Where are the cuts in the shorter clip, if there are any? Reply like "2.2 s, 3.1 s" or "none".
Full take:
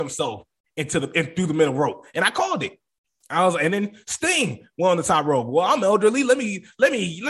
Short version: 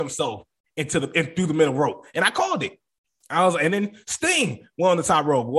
none